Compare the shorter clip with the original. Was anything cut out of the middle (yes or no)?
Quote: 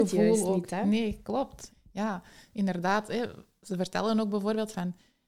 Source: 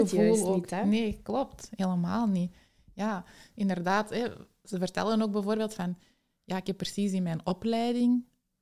yes